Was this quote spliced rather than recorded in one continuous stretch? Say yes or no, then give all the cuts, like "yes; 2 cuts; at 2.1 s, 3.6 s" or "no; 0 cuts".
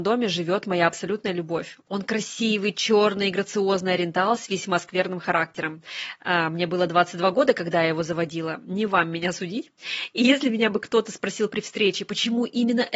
yes; 1 cut; at 1.8 s